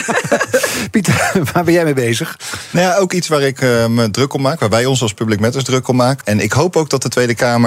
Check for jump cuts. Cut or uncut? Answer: cut